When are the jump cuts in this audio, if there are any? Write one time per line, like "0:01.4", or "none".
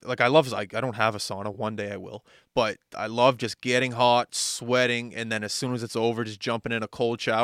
none